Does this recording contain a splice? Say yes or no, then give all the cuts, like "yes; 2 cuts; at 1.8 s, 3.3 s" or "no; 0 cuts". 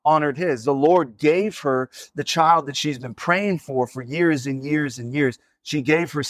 no; 0 cuts